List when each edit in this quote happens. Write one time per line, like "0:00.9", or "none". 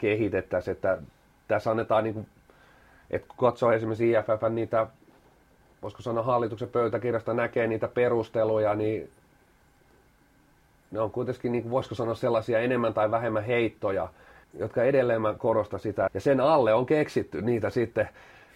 0:14.4
0:16.1